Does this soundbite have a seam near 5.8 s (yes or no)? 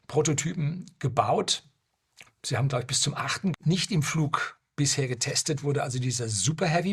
no